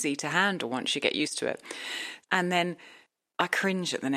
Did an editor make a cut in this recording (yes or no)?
yes